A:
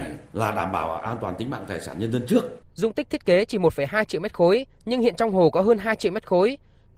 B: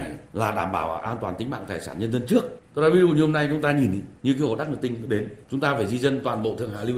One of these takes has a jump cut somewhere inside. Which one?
A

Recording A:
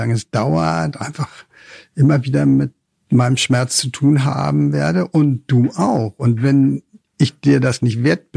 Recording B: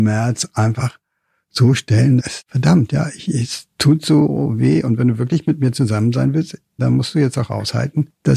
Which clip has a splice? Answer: B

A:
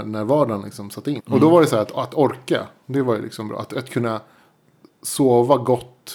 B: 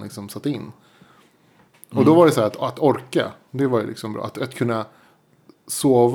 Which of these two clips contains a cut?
A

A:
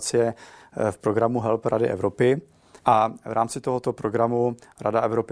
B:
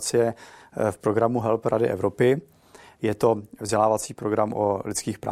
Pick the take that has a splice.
A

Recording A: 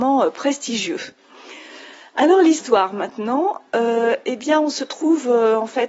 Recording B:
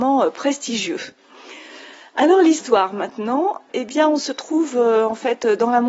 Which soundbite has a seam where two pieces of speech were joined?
B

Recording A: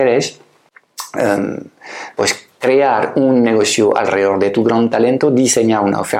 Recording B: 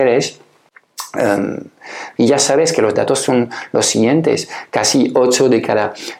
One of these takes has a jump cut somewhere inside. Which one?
B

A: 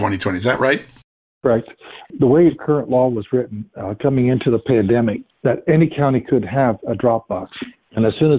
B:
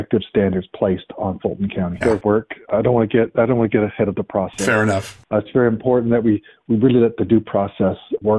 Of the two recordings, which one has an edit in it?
B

